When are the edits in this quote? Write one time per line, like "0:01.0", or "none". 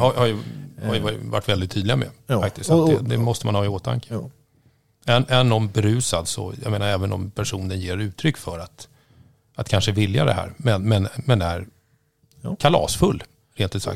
none